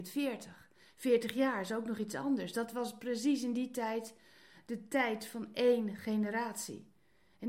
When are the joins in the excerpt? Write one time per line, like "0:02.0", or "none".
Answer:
none

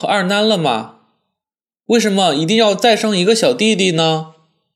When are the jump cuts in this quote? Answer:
none

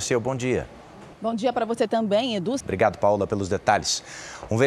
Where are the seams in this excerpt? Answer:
0:01.1
0:02.6

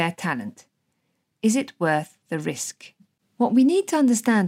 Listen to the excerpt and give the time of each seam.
0:01.3

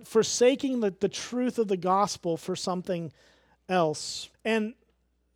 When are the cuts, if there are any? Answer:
0:04.3

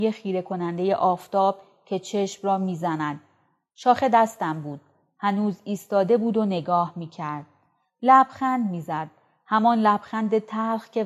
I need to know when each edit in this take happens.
none

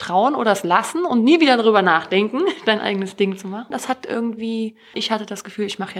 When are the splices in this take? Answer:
0:03.7
0:04.9

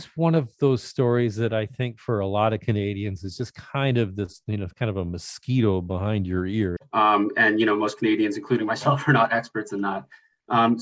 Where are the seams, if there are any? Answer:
0:06.8

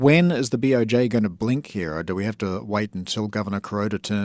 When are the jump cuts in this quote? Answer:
none

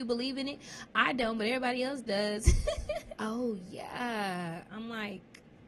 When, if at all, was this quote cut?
0:03.1
0:04.6

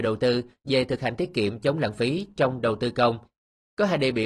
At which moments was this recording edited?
none

